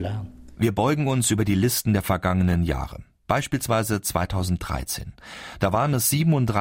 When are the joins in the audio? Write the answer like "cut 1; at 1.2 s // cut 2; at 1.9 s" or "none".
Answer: none